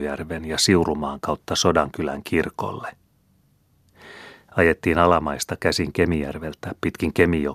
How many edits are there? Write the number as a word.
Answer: one